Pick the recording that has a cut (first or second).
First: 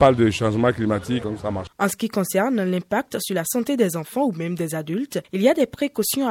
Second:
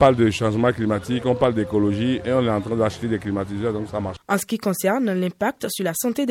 first